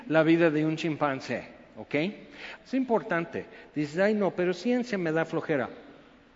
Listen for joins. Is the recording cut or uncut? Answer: cut